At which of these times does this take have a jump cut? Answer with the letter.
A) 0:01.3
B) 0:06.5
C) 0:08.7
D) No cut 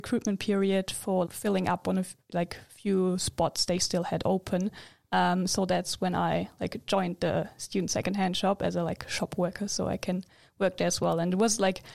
A